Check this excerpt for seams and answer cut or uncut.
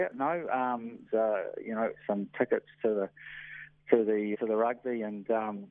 cut